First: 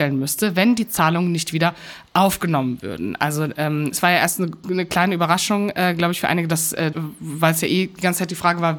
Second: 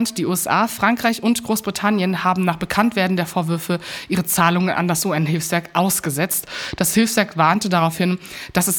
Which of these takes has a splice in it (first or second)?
first